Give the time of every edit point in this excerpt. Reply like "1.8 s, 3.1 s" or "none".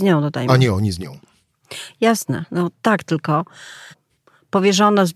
3.9 s